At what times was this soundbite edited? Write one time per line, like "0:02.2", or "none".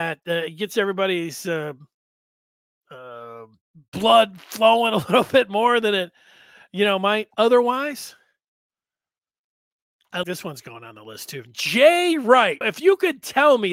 0:10.2
0:12.6